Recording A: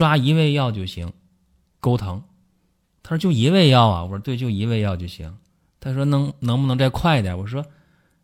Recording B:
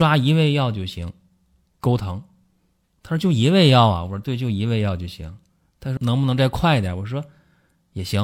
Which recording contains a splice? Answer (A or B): B